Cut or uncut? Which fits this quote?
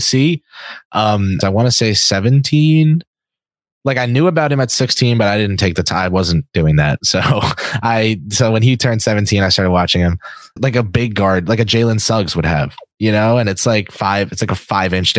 cut